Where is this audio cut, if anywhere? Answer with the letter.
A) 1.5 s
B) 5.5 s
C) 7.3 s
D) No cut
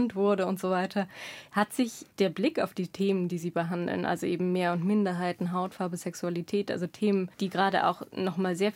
C